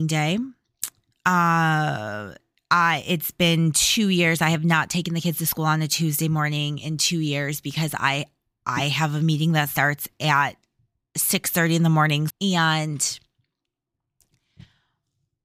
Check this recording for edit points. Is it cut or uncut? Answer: cut